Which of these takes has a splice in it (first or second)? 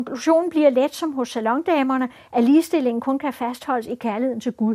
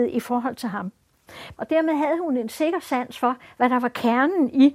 second